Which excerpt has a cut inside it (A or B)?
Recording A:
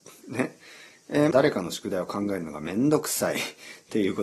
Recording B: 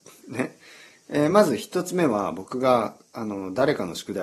A